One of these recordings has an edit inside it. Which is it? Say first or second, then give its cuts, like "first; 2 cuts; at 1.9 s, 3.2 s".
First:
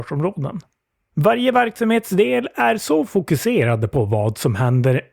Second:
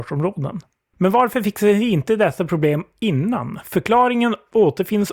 second; 1 cut; at 0.9 s